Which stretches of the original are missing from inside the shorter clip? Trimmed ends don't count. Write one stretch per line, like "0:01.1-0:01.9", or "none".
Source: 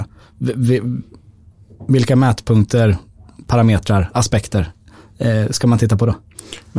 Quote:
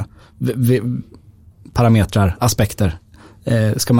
0:01.6-0:03.4